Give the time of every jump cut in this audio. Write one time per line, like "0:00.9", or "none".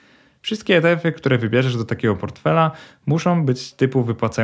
none